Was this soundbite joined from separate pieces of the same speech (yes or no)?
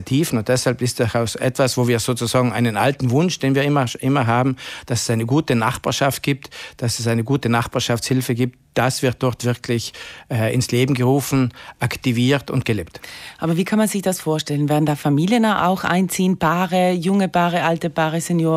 no